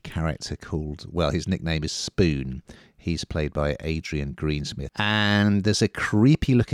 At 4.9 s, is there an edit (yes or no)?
yes